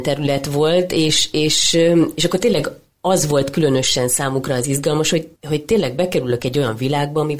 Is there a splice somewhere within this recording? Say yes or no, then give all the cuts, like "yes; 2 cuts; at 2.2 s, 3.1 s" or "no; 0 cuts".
no; 0 cuts